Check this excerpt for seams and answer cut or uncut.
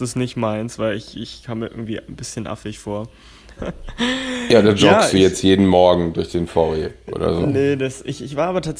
cut